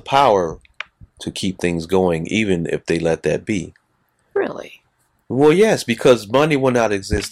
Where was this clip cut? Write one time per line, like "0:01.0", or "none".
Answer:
none